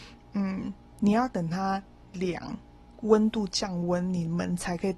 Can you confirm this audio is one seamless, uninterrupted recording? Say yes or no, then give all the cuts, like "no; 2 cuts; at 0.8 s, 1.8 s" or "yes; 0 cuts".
yes; 0 cuts